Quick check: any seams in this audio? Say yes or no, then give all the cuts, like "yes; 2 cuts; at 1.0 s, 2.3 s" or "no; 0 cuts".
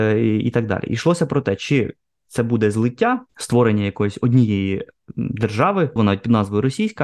yes; 2 cuts; at 3.3 s, 6.0 s